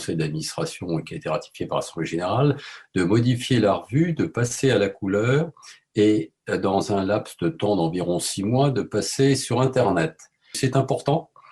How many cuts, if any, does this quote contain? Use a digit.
1